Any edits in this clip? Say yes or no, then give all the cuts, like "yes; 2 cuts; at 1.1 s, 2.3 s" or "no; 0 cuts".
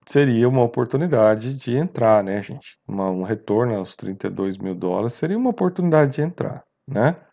no; 0 cuts